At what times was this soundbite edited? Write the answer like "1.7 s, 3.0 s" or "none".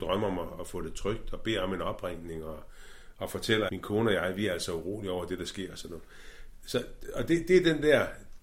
3.7 s